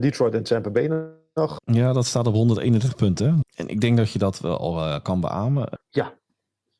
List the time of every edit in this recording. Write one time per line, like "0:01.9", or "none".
0:01.6
0:03.4
0:05.8

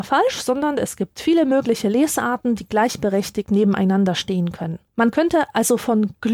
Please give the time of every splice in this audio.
0:04.9

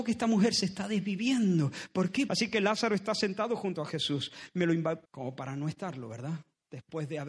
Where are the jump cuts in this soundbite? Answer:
0:02.3
0:05.0

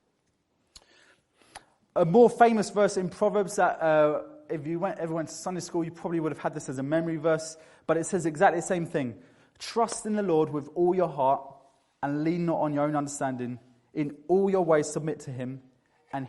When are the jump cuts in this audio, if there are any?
none

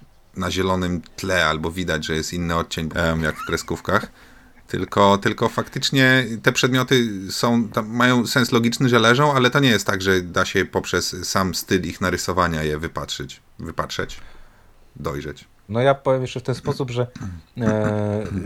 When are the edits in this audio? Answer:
0:02.9
0:15.7

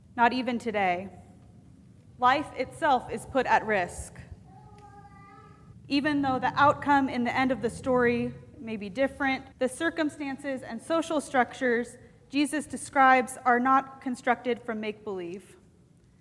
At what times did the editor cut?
0:02.1
0:05.7
0:09.5

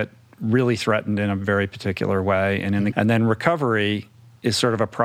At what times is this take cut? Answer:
0:02.9

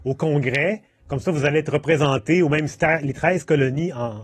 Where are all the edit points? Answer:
0:02.8

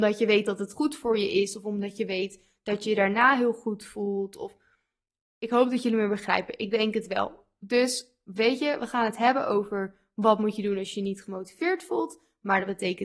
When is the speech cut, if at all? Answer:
none

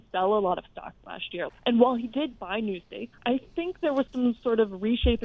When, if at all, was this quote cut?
0:01.5
0:03.1

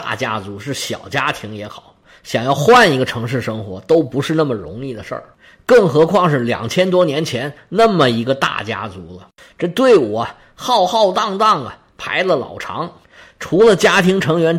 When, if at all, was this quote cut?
none

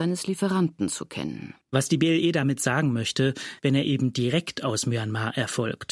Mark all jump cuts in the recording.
0:01.6
0:03.6

